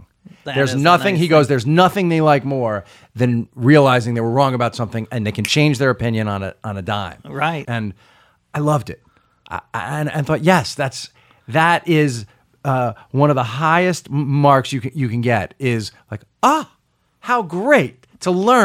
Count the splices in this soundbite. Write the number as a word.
one